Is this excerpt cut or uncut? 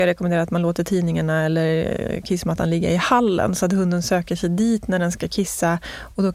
uncut